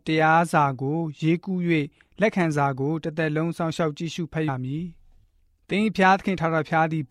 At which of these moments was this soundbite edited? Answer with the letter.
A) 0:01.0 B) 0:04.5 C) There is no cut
B